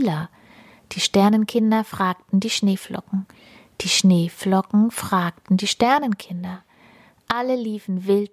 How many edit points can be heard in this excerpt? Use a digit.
0